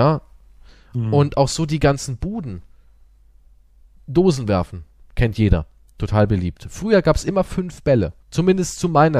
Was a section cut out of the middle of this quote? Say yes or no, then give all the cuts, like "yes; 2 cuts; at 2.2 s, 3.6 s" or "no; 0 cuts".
yes; 1 cut; at 8.2 s